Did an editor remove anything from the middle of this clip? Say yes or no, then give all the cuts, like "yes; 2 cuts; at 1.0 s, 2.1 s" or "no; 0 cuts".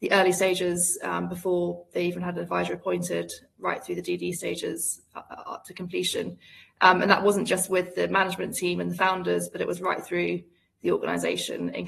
no; 0 cuts